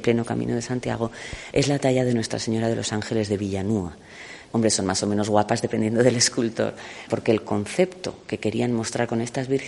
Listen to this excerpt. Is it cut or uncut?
cut